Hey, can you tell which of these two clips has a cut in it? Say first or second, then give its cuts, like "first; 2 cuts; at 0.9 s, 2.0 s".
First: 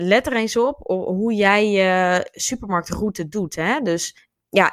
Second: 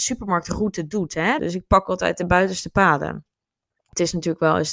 second; 1 cut; at 1.4 s